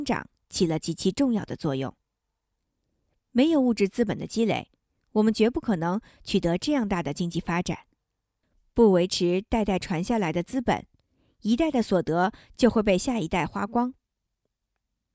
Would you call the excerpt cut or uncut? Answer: uncut